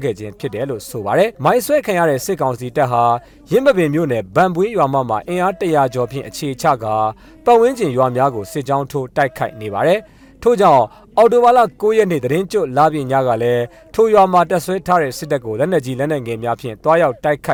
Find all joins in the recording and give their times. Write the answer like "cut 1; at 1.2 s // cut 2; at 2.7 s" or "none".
cut 1; at 1.3 s